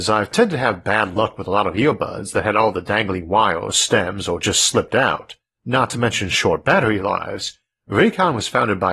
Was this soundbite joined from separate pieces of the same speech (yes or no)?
yes